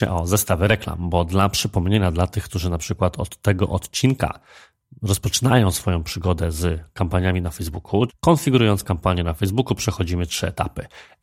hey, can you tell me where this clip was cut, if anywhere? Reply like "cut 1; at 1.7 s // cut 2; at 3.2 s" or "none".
cut 1; at 8.1 s